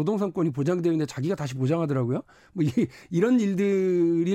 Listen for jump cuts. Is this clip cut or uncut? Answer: uncut